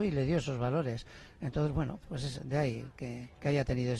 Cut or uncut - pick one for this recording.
uncut